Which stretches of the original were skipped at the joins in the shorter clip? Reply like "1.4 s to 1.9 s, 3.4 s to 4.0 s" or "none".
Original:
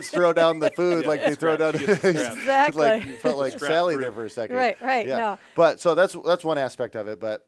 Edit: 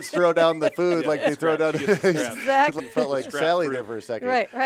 2.8 s to 3.1 s